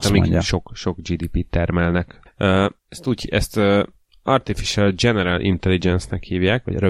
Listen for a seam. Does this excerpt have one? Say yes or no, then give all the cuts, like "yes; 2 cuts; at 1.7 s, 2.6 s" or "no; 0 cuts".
yes; 1 cut; at 2.8 s